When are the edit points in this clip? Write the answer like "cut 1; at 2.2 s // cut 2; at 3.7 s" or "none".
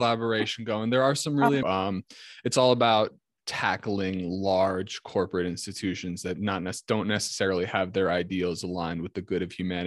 cut 1; at 1.6 s